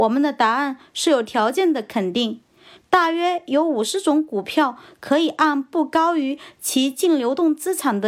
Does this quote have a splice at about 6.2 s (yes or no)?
no